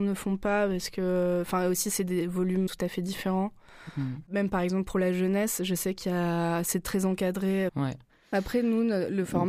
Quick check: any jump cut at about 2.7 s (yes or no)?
yes